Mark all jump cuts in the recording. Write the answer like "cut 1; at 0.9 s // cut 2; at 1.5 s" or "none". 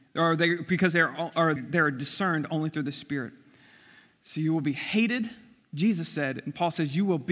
cut 1; at 1.6 s